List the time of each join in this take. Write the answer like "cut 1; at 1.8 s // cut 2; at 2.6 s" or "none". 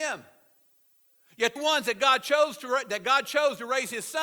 cut 1; at 1.6 s